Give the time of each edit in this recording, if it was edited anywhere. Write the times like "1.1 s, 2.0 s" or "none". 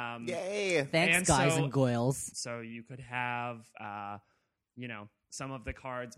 2.3 s